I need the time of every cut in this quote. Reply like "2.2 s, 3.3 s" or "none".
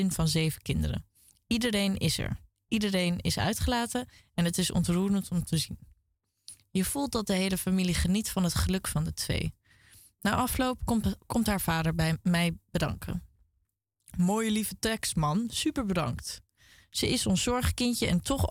none